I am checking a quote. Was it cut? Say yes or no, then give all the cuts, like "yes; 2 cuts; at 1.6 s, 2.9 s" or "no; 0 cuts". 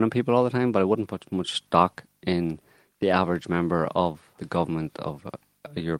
yes; 1 cut; at 4.4 s